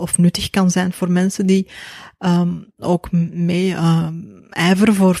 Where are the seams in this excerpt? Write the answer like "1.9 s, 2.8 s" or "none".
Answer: none